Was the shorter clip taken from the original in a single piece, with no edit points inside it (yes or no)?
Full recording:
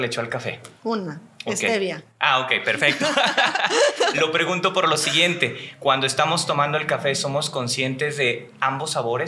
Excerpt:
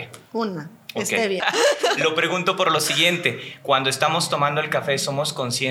no